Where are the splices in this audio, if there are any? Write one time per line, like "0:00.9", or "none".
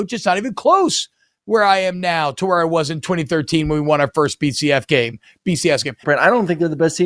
0:06.0